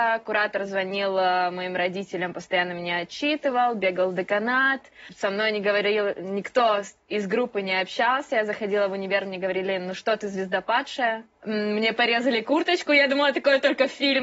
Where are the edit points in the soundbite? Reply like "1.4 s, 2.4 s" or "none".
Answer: none